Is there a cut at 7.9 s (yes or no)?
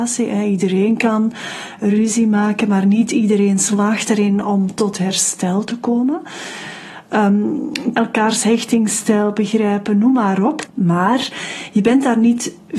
yes